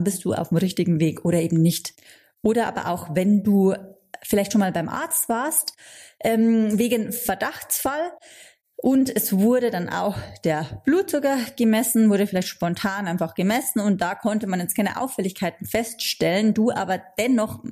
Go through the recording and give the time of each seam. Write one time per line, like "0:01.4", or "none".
none